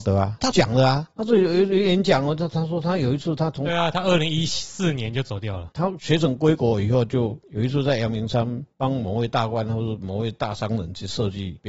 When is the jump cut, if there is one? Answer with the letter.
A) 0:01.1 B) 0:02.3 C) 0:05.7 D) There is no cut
C